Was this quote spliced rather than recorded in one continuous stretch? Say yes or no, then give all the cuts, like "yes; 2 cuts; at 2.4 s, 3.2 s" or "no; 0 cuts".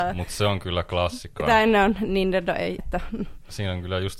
yes; 2 cuts; at 1.4 s, 2.8 s